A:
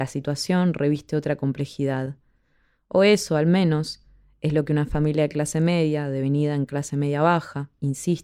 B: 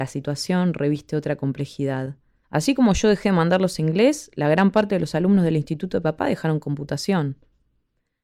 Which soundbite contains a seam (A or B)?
B